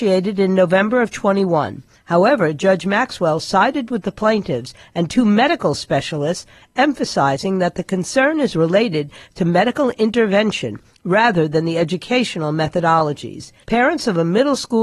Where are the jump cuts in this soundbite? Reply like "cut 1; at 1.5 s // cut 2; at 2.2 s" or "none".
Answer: cut 1; at 1.9 s // cut 2; at 13.6 s